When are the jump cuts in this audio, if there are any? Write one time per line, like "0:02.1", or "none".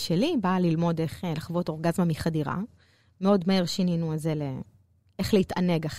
none